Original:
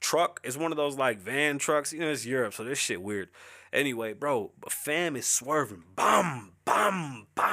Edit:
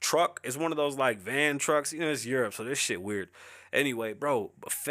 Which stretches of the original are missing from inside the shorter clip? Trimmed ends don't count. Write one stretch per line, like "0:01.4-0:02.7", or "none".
none